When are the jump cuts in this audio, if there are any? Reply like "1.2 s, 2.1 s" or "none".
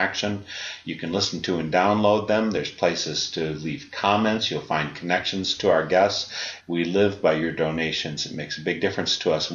6.6 s